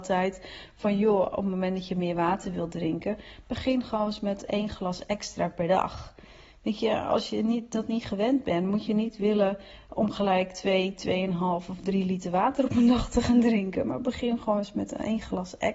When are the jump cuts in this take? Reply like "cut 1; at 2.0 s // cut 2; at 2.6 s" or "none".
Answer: none